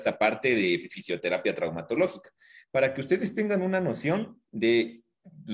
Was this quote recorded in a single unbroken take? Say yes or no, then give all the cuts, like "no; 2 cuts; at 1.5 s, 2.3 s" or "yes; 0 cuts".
yes; 0 cuts